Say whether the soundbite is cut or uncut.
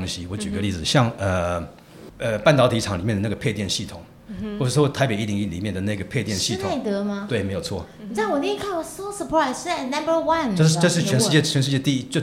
uncut